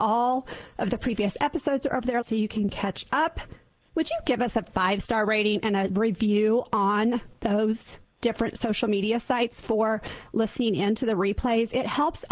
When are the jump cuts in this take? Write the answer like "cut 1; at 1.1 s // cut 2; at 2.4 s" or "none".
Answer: cut 1; at 2.2 s // cut 2; at 3.9 s